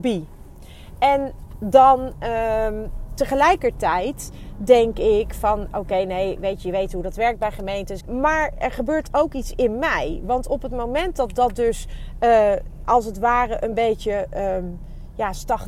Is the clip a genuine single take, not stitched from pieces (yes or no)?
no